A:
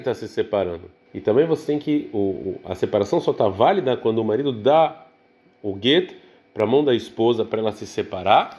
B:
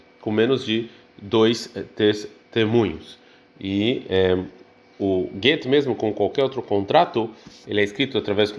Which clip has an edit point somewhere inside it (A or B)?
A